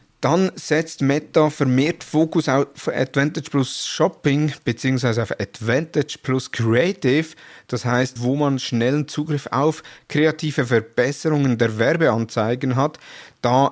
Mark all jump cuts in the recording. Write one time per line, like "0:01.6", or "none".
0:08.2